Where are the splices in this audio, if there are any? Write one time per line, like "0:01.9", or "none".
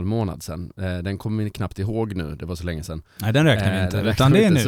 none